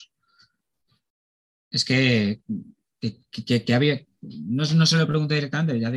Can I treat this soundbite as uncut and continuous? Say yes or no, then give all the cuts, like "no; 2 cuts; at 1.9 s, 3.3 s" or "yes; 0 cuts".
yes; 0 cuts